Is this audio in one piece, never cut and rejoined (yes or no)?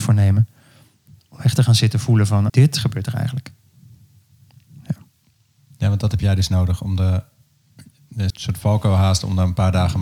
no